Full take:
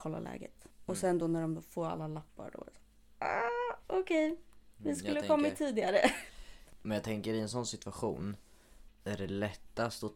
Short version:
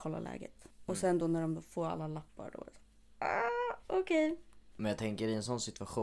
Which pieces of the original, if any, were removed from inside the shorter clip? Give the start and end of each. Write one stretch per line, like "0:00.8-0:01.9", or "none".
0:04.7-0:06.8